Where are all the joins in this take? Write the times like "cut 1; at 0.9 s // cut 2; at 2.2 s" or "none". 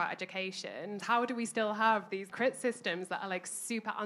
cut 1; at 1.0 s // cut 2; at 2.3 s

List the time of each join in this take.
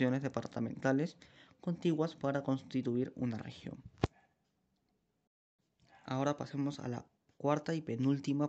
none

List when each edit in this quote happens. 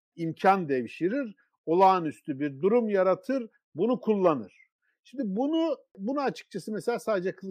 none

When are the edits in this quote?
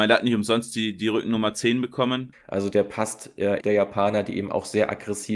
cut 1; at 2.3 s // cut 2; at 3.6 s

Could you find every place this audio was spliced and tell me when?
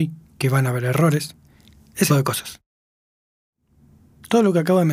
cut 1; at 2.1 s

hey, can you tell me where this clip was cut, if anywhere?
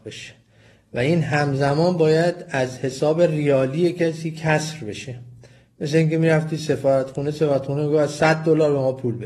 none

